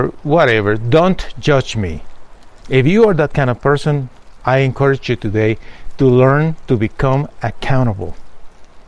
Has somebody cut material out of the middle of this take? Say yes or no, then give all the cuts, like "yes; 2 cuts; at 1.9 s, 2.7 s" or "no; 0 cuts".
yes; 1 cut; at 2.6 s